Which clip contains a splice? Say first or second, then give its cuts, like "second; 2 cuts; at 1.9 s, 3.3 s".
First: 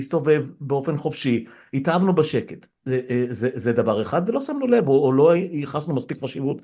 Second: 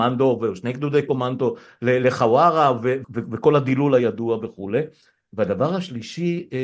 second; 1 cut; at 3.0 s